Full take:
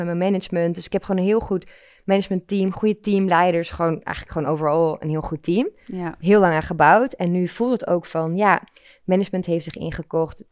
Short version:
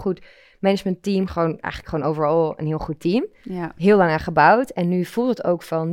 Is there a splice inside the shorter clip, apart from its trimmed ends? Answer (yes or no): yes